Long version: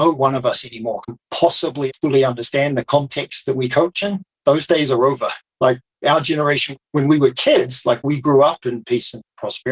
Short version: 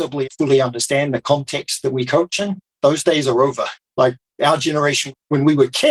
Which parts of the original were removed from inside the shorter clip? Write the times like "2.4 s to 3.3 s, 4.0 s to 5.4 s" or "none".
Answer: none